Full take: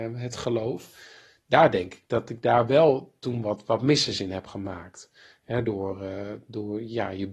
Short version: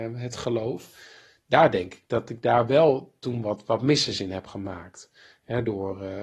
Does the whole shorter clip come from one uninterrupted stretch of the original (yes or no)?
yes